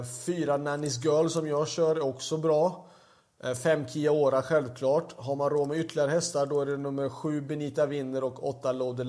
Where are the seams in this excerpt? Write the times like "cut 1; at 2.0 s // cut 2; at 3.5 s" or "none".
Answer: none